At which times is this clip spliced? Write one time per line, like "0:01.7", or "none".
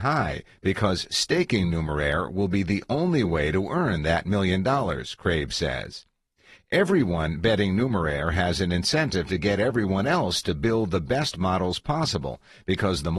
0:06.6

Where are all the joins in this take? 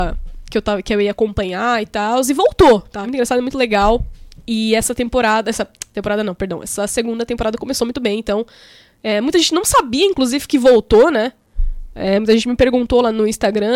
0:03.0

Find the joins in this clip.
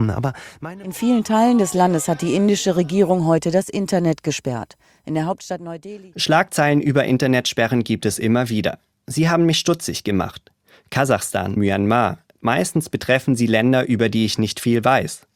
0:11.6

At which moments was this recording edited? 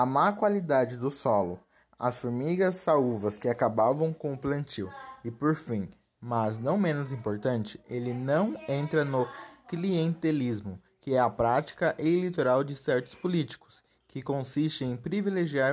none

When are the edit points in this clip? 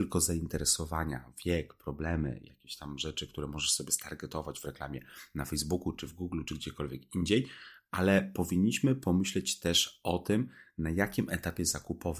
none

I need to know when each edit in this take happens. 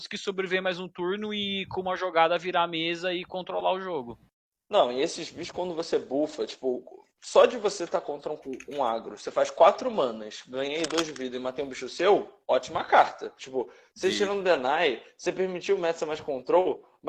0:13.4

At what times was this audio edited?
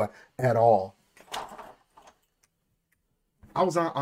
none

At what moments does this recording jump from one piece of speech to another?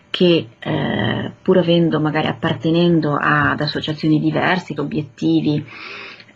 0:04.8

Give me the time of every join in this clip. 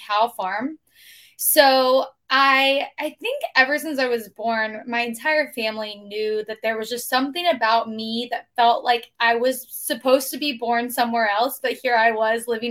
none

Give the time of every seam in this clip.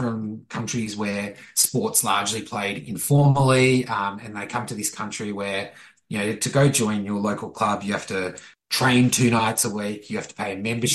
none

